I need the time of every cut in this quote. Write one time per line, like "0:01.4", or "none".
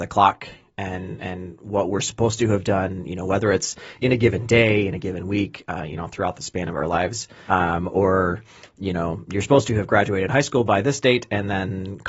0:07.5